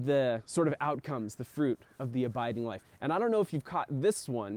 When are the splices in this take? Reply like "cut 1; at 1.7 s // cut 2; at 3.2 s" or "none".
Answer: cut 1; at 2.8 s

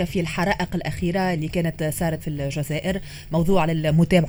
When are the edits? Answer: cut 1; at 2.2 s

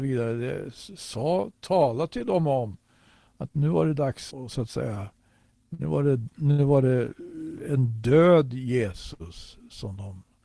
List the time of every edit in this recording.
cut 1; at 4.3 s

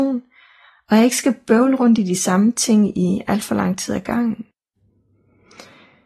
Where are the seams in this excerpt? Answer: none

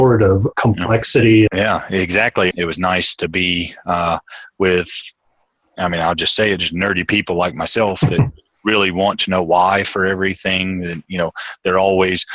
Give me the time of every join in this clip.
cut 1; at 1.5 s // cut 2; at 2.5 s

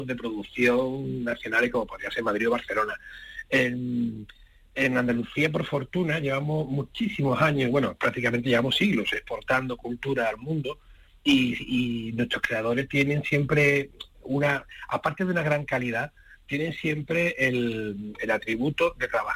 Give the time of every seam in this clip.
none

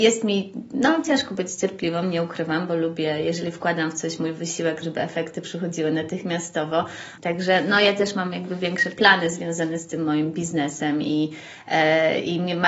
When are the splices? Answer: cut 1; at 4.8 s // cut 2; at 7.2 s

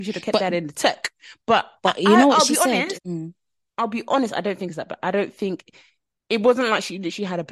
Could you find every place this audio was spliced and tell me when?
cut 1; at 2.9 s

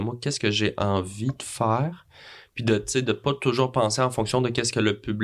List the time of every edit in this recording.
none

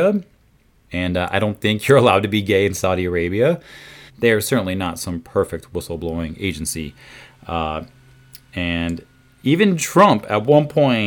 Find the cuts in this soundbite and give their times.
cut 1; at 4.1 s

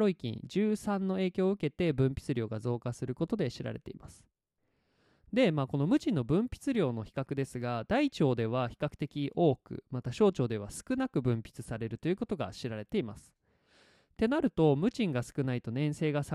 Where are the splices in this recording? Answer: none

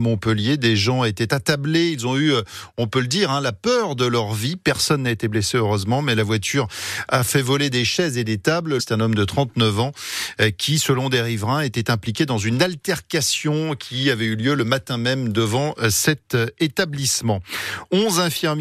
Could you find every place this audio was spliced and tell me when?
cut 1; at 8.8 s

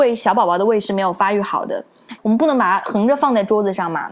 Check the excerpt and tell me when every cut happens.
cut 1; at 2.2 s

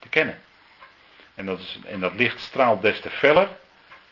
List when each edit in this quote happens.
cut 1; at 1.3 s

